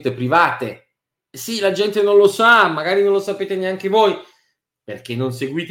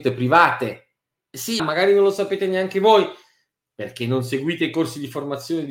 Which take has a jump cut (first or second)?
second